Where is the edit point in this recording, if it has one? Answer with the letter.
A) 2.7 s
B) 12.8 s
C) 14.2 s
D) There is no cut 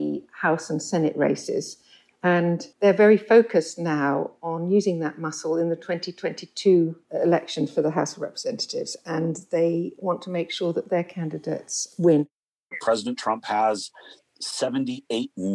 A